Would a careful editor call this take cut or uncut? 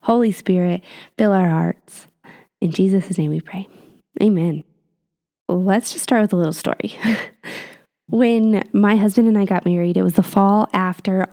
uncut